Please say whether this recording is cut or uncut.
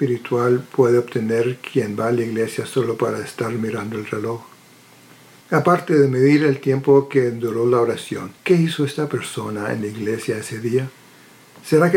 cut